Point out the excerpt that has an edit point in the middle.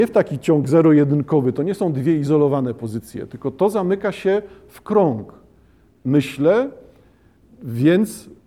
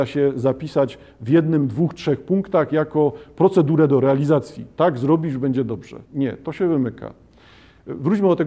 second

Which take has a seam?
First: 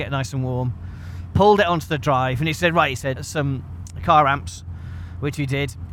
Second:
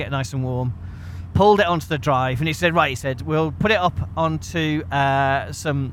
first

